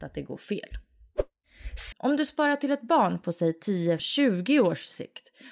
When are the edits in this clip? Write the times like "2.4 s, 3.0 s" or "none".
1.9 s, 4.0 s